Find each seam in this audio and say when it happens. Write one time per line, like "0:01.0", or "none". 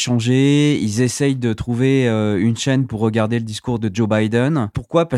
none